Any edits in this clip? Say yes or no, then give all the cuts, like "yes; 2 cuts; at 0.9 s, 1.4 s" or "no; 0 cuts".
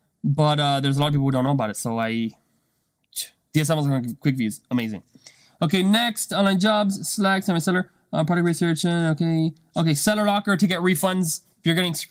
no; 0 cuts